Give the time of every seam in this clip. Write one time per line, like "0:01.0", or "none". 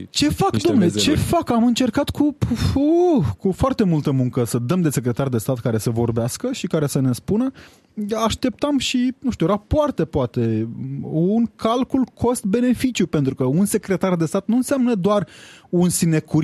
none